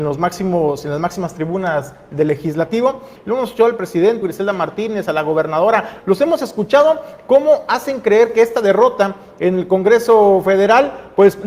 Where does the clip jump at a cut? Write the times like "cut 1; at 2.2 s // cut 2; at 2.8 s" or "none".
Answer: cut 1; at 3.2 s // cut 2; at 4.2 s // cut 3; at 6.0 s

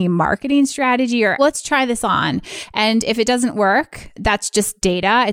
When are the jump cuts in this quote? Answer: cut 1; at 1.4 s // cut 2; at 4.2 s

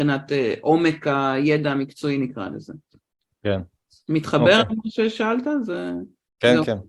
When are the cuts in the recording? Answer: none

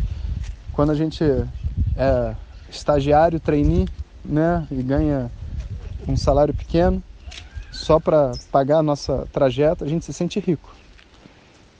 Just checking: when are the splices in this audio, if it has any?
none

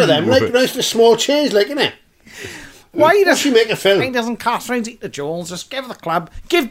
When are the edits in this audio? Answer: none

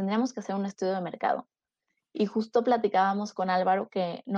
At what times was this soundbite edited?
none

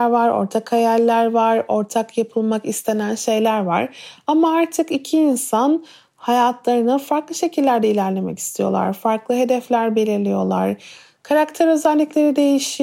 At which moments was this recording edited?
none

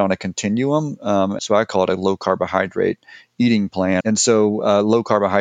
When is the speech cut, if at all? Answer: cut 1; at 1.4 s // cut 2; at 4.0 s

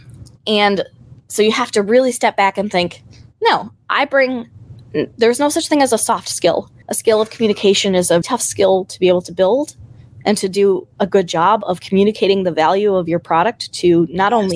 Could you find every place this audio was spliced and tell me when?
cut 1; at 6.8 s // cut 2; at 8.2 s

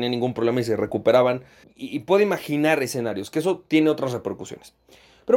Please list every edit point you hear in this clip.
cut 1; at 1.6 s

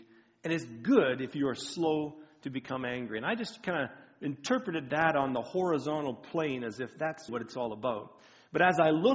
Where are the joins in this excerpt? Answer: cut 1; at 7.3 s

